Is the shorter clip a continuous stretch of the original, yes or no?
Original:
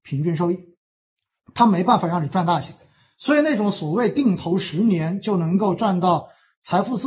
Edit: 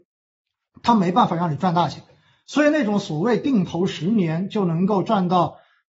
yes